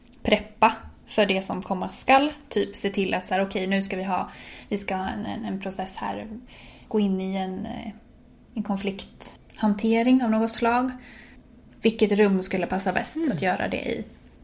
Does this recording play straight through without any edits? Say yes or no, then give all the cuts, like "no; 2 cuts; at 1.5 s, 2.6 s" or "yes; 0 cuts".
yes; 0 cuts